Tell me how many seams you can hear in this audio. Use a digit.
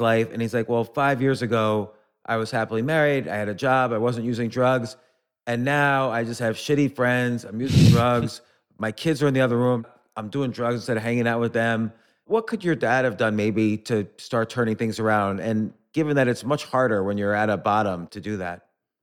0